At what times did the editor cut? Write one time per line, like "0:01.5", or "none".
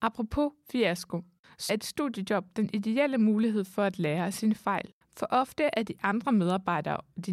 0:01.7